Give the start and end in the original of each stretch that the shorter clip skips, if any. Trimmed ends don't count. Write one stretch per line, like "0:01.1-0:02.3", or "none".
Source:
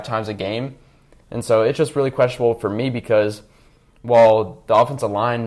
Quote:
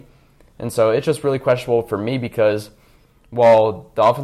none